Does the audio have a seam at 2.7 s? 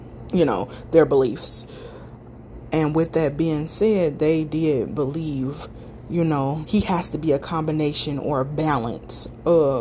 no; 1 cut; at 6.6 s

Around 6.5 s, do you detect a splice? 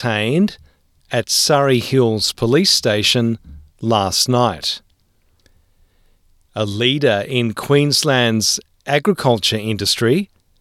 yes; 1 cut; at 6.5 s

